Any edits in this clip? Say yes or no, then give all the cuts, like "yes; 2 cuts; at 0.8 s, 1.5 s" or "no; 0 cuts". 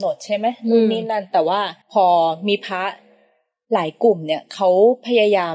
yes; 1 cut; at 1.8 s